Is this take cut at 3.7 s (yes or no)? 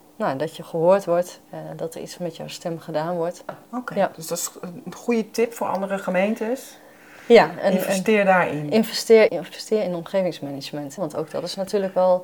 no